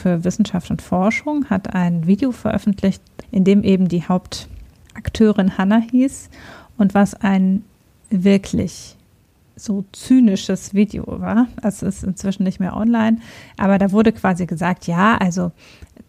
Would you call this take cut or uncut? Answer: cut